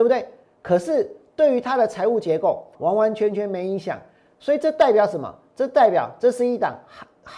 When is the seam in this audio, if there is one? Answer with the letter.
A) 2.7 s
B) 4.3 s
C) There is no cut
A